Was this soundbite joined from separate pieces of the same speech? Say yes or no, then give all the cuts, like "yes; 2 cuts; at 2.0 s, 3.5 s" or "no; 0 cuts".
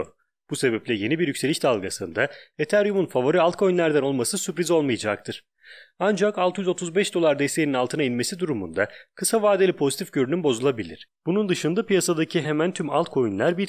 yes; 1 cut; at 12.4 s